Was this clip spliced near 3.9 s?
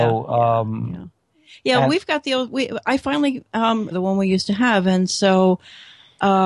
yes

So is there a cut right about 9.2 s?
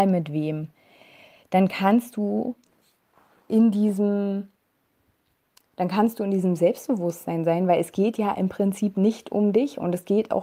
no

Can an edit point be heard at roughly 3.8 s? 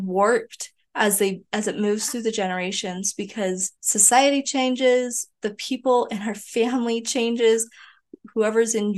yes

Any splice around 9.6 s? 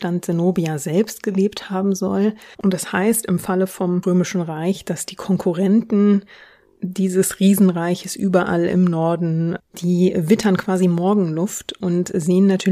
yes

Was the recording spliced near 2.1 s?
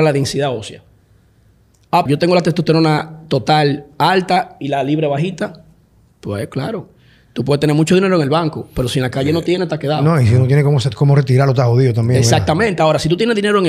yes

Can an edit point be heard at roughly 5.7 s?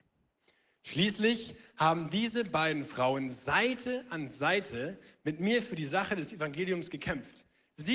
no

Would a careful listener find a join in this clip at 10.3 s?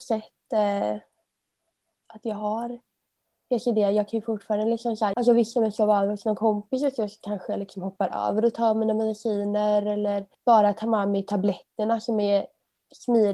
yes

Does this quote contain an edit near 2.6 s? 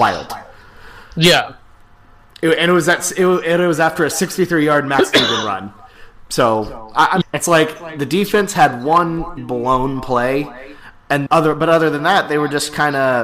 no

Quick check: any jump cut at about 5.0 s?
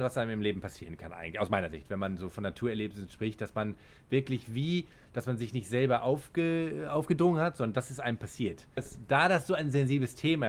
no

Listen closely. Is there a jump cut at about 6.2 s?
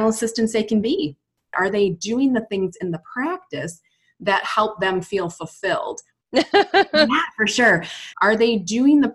yes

